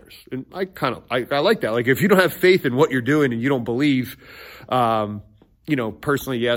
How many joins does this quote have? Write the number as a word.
zero